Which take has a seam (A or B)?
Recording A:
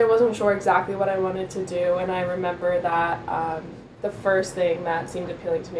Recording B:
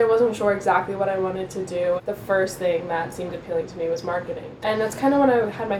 B